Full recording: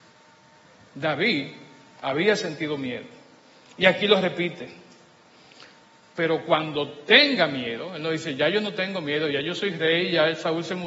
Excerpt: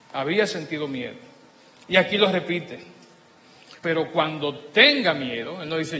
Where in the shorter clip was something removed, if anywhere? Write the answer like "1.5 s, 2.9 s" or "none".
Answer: 3.8 s